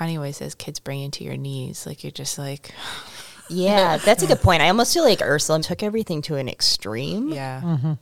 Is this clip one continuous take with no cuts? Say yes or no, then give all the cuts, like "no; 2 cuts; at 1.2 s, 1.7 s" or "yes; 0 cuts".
no; 1 cut; at 5.6 s